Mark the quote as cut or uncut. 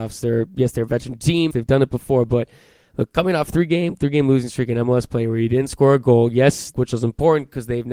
cut